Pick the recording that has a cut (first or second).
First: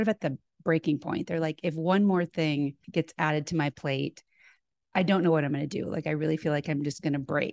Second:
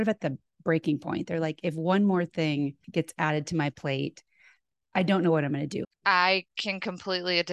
second